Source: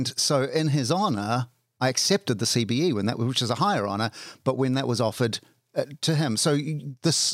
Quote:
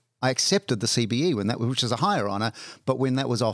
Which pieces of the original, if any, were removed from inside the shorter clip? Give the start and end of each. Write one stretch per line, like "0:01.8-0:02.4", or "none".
none